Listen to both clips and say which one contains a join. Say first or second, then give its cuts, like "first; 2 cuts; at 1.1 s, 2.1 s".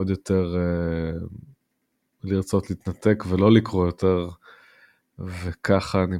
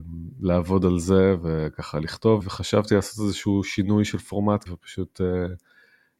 second; 2 cuts; at 2.4 s, 4.7 s